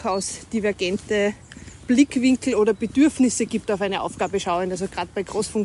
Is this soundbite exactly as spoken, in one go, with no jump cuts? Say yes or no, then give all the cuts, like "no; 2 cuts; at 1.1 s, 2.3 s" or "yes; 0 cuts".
yes; 0 cuts